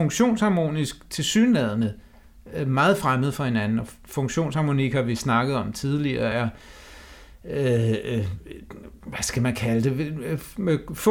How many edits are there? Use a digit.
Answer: 0